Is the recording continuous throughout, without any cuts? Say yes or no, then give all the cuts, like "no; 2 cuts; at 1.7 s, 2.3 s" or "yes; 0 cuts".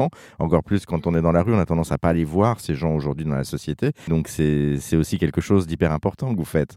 no; 1 cut; at 4.1 s